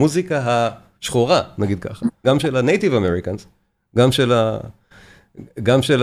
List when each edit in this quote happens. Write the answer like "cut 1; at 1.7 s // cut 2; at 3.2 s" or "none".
cut 1; at 2.2 s